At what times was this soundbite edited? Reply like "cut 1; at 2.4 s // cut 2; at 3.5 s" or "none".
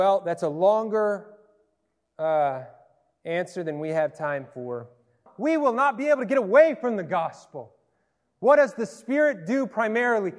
cut 1; at 5.3 s